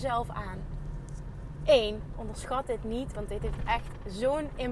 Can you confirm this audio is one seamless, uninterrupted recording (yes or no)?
no